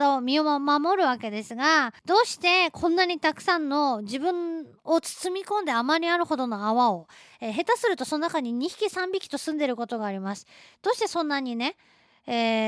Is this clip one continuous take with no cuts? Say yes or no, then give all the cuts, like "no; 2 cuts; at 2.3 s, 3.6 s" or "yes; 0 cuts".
no; 1 cut; at 2.0 s